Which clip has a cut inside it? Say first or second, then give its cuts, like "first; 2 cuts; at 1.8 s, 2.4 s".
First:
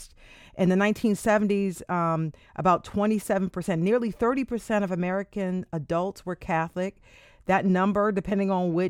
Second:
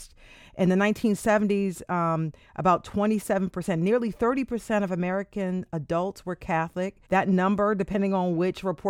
second; 1 cut; at 7.1 s